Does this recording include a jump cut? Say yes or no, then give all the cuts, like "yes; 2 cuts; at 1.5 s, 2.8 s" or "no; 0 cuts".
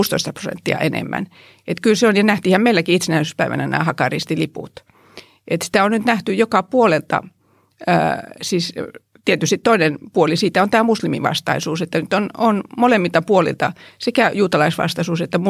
no; 0 cuts